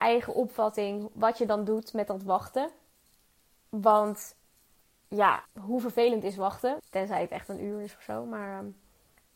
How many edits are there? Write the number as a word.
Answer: two